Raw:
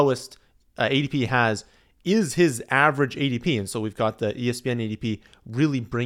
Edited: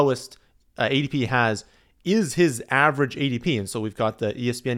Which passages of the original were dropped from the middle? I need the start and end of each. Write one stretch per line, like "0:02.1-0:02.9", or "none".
none